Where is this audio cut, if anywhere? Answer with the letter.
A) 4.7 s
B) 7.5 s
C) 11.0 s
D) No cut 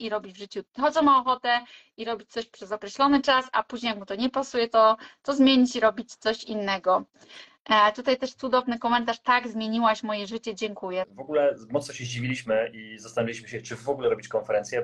C